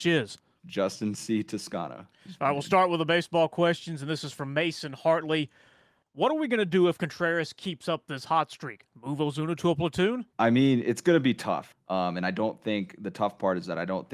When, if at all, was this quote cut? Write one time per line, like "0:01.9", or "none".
0:10.3
0:11.7